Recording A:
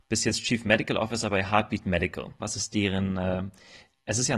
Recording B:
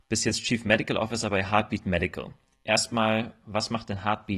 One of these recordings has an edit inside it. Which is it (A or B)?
A